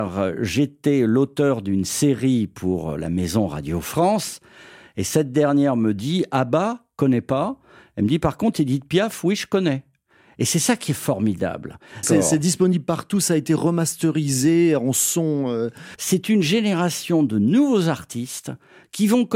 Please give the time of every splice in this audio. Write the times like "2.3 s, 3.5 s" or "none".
12.0 s, 16.0 s